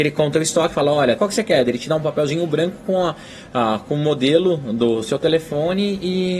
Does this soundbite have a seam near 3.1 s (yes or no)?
no